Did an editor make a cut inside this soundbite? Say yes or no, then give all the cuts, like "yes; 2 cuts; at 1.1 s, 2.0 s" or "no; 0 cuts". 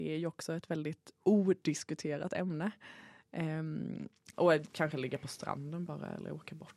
yes; 1 cut; at 4.3 s